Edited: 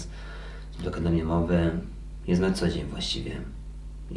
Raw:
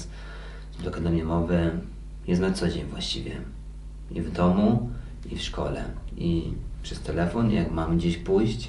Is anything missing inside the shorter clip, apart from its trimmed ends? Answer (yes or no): no